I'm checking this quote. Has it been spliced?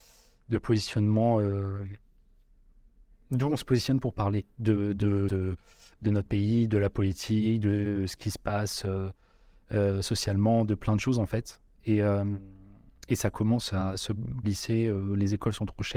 yes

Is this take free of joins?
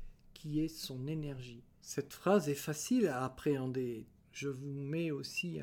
no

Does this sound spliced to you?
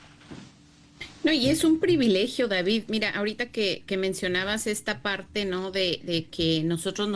no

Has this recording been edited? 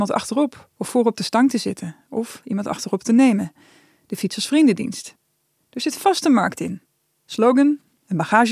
yes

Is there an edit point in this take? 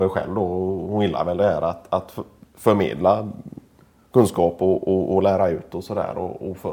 no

